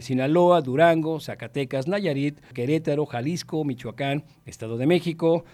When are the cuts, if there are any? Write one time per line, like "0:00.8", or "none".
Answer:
0:02.5

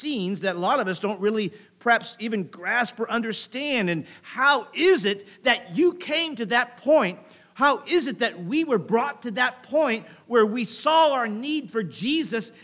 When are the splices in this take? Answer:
none

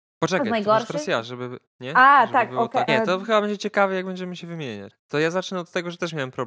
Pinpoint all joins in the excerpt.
0:02.9
0:04.9

